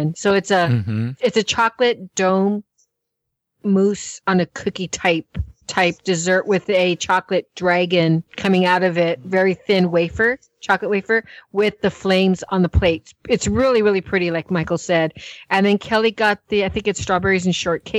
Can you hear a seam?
yes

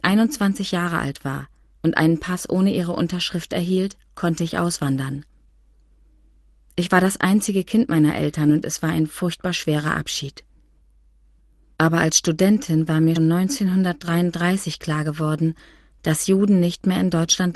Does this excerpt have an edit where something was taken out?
yes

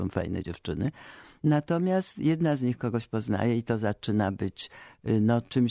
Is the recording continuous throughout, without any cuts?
yes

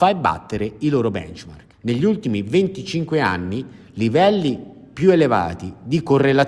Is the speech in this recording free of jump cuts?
no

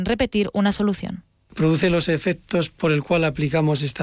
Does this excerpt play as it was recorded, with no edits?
yes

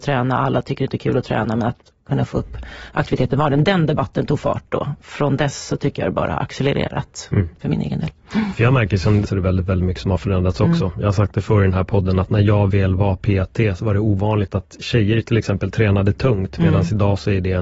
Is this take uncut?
no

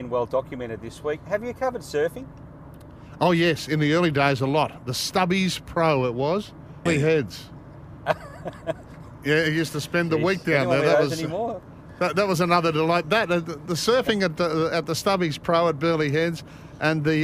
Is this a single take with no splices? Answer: no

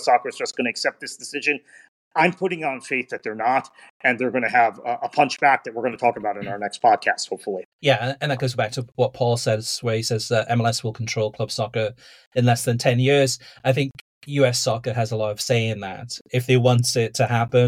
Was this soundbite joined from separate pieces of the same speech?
yes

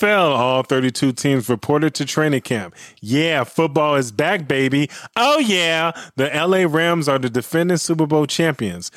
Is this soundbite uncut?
yes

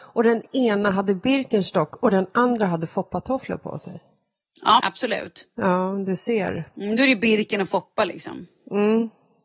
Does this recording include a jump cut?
yes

